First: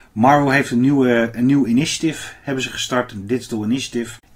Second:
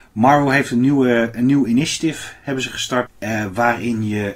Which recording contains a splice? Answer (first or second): second